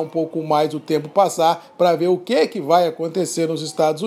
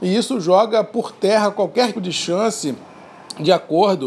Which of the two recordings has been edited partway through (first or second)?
second